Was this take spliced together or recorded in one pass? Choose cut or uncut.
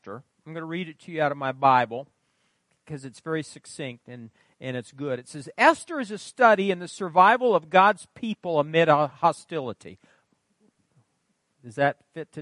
uncut